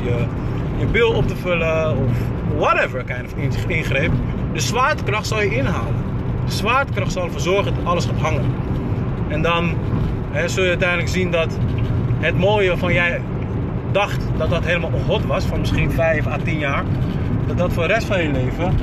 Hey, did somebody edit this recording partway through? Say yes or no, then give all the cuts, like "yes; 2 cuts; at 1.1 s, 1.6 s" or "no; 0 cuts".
no; 0 cuts